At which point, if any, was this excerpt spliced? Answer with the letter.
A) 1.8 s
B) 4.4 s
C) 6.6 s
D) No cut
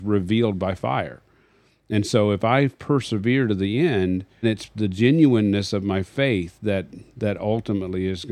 B